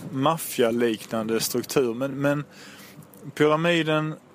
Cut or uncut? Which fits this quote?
uncut